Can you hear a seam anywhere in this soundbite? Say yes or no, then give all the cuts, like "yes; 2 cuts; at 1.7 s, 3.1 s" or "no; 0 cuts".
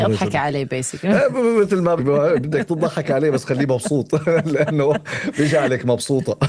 yes; 1 cut; at 2.0 s